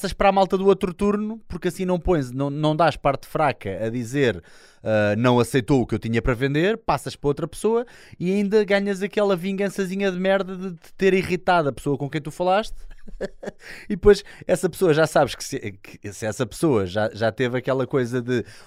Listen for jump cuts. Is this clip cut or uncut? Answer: uncut